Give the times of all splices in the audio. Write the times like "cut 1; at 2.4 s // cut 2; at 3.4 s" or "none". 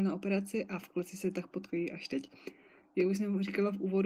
none